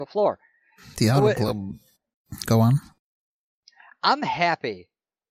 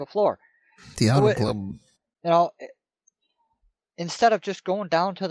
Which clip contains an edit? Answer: second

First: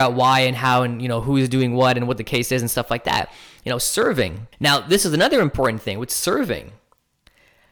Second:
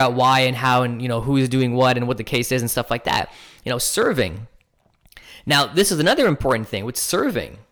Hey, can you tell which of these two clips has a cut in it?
first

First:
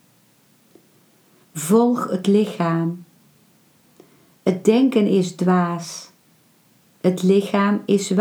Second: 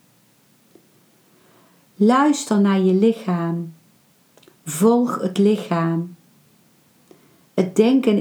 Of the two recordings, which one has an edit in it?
first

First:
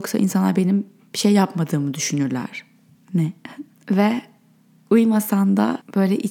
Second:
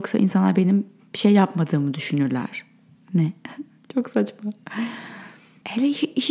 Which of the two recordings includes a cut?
first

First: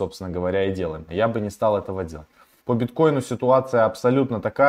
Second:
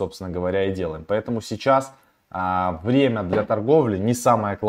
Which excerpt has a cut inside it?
first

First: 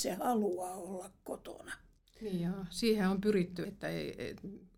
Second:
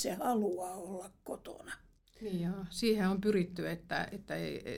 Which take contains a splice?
first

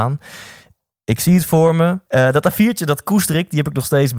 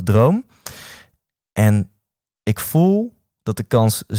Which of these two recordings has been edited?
first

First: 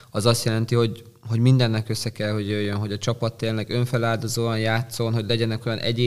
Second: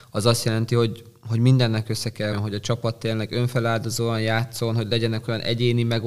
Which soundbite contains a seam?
second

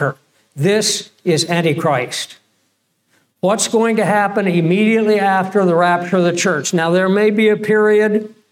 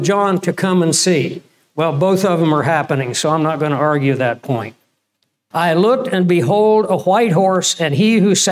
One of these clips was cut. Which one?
second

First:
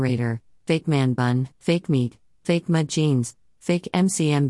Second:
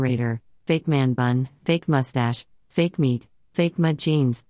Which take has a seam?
first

